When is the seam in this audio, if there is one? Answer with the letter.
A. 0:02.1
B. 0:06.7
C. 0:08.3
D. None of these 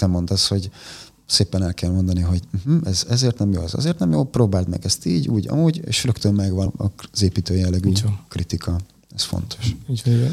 B